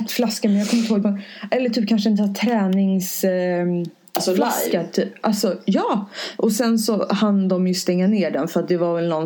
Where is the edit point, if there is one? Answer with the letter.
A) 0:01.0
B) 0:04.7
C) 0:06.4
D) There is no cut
A